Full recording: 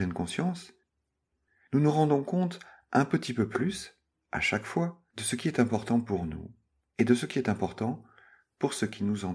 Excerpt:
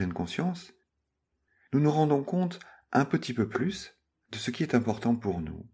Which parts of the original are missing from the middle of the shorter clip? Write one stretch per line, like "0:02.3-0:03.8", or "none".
0:04.2-0:05.1